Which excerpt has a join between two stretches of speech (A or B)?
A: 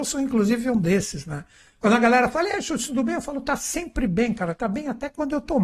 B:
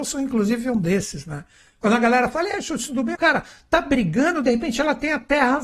B